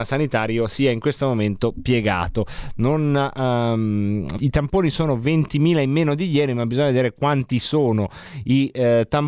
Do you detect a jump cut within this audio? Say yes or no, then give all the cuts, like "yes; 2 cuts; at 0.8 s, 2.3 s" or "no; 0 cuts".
yes; 1 cut; at 4.4 s